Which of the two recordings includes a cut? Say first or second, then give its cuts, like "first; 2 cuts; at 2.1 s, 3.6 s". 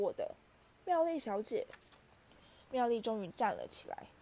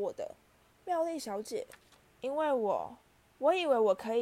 second; 1 cut; at 2.0 s